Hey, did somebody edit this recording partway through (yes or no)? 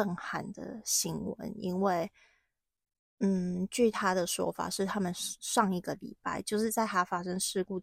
no